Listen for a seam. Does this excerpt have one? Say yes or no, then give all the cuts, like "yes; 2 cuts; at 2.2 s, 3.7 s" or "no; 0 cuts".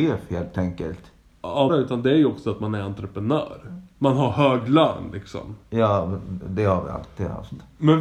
yes; 1 cut; at 1.7 s